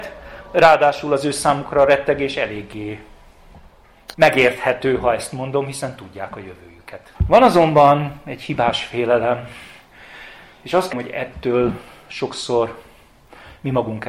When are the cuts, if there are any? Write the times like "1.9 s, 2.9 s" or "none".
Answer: 4.1 s, 7.1 s, 10.9 s